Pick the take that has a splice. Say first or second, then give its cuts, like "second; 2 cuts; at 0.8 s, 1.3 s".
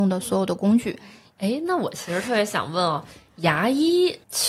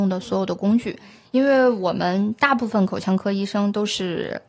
first; 1 cut; at 1.3 s